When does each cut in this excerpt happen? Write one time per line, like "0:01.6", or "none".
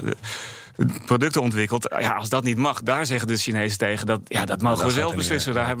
none

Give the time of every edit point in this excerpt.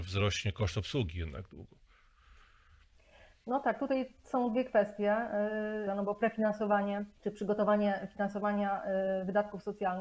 0:05.9
0:07.2

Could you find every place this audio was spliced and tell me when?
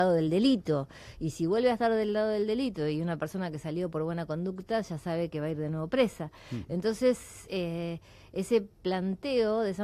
none

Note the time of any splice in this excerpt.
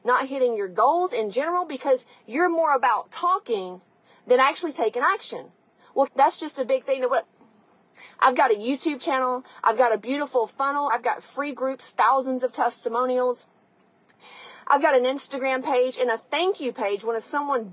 0:06.1
0:09.6
0:10.9

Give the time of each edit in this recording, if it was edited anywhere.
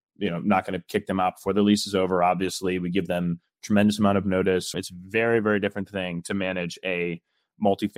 0:04.7

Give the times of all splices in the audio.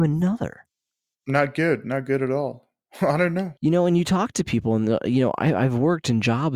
0:03.6

